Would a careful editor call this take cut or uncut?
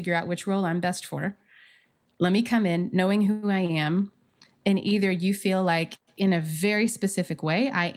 uncut